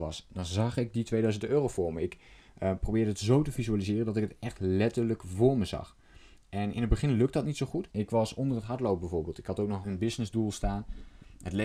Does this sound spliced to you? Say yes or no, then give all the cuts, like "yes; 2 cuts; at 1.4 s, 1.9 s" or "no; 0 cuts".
yes; 2 cuts; at 7.9 s, 9.8 s